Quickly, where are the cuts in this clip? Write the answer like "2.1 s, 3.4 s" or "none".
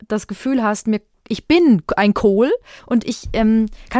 2.8 s